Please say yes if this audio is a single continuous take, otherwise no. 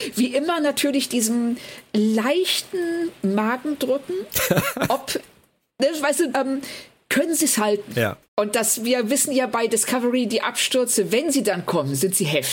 no